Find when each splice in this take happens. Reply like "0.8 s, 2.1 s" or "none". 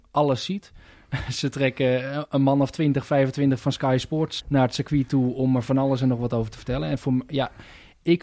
4.4 s